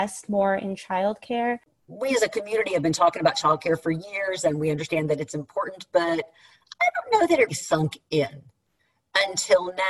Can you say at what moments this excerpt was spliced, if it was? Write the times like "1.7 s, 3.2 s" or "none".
7.5 s